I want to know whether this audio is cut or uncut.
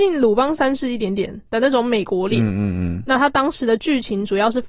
uncut